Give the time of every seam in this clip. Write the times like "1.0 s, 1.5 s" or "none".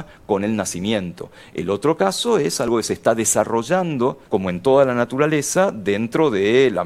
4.3 s